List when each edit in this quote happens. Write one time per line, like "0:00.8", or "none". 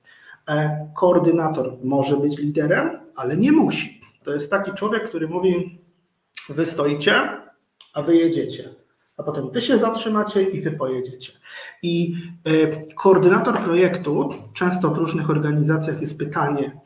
0:04.2